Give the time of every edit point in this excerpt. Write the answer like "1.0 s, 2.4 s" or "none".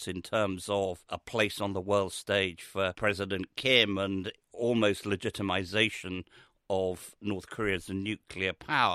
none